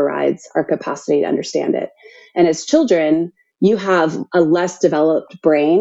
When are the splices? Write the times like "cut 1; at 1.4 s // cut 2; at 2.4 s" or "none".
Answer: none